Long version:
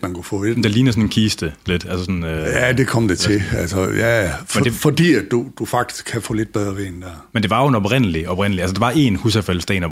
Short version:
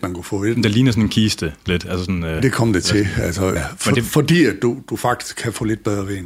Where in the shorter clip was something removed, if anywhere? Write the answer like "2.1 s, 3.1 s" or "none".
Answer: 2.4 s, 3.6 s